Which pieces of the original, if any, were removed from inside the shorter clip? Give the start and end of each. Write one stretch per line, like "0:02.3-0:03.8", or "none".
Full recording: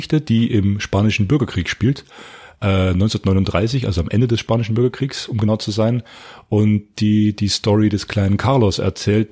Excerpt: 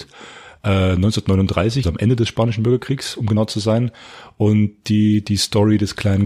0:03.8-0:03.9